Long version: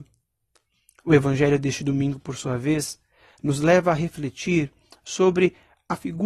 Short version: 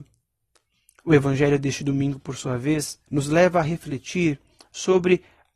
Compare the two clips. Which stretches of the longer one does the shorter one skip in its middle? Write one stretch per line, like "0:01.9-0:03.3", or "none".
0:03.1-0:03.4